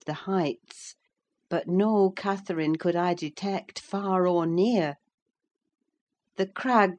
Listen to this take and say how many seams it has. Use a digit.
0